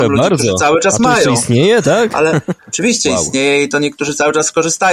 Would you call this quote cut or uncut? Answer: cut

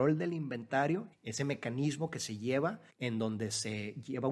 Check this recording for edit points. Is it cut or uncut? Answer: cut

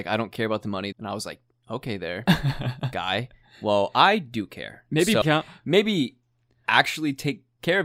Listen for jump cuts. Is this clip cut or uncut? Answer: cut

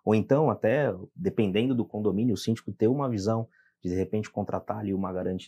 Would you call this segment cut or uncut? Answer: uncut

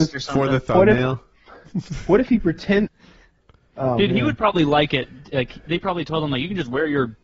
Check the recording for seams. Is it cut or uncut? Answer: cut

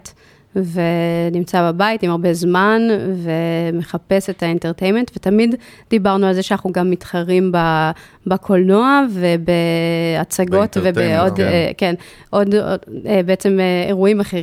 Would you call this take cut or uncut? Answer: uncut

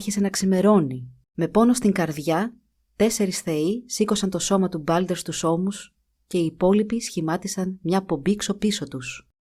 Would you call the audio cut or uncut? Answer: cut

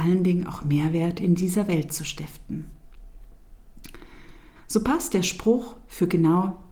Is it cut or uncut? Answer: cut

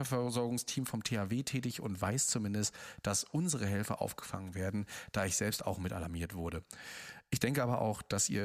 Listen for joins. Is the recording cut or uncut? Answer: uncut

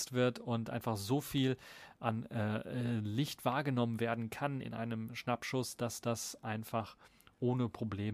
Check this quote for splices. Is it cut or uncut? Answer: uncut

